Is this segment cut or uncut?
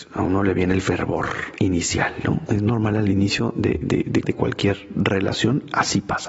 cut